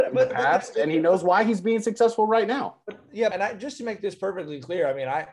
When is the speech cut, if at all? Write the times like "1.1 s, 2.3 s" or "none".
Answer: 3.3 s